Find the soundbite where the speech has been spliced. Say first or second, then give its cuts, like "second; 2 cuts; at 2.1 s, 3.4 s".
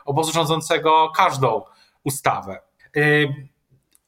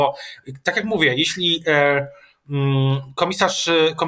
first; 1 cut; at 2.8 s